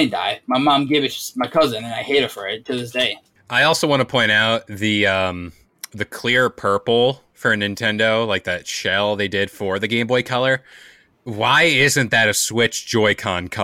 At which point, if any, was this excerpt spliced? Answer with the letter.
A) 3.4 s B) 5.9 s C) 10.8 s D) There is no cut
A